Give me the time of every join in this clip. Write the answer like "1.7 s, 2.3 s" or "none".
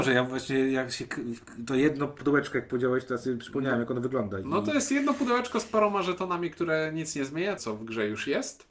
7.6 s